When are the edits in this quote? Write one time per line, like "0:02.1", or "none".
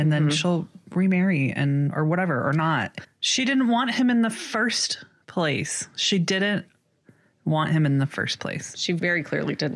none